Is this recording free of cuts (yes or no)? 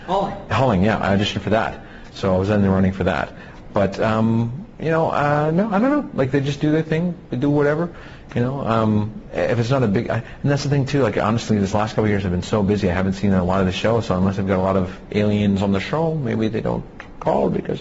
yes